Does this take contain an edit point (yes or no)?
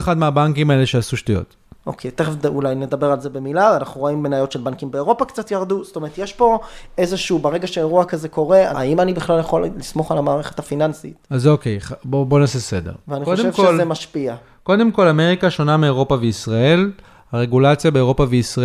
yes